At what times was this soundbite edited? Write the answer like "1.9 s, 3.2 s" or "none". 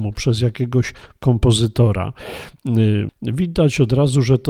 3.1 s